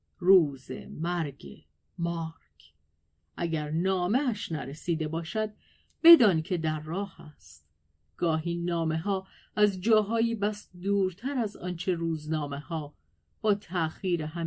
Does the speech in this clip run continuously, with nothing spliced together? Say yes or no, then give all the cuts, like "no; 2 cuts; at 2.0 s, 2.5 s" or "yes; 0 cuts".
yes; 0 cuts